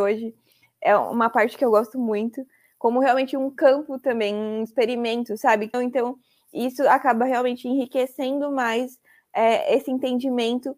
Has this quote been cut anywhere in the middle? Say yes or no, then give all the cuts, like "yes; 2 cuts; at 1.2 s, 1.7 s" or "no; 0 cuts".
yes; 1 cut; at 5.7 s